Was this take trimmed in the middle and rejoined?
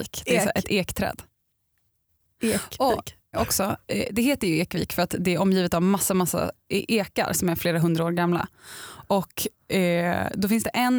yes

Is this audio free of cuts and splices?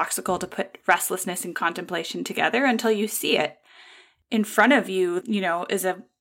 no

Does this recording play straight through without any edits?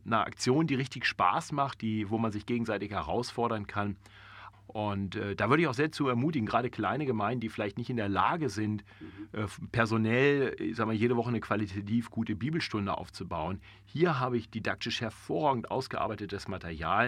no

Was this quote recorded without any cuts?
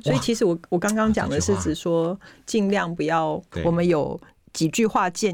no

